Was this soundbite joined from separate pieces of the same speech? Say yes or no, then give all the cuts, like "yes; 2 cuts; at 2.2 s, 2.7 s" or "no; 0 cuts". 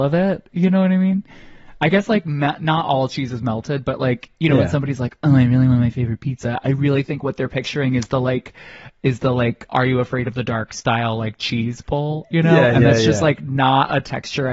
yes; 1 cut; at 9.7 s